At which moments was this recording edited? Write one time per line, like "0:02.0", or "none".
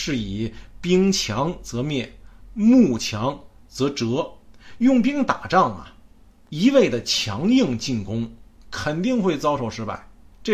none